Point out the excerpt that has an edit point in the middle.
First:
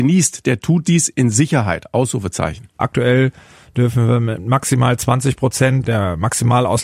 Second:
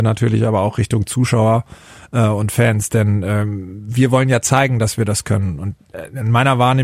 first; 2 cuts; at 2.8 s, 5.8 s

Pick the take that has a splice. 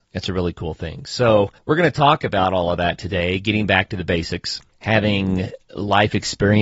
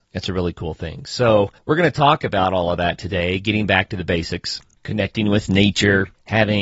first; 1 cut; at 4.7 s

